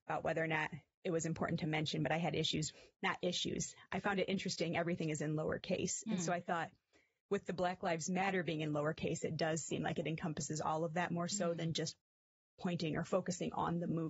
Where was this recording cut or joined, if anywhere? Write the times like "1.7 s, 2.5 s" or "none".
none